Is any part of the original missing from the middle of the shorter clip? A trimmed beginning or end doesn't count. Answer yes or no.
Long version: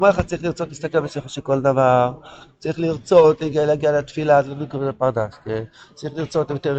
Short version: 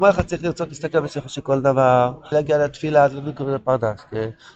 yes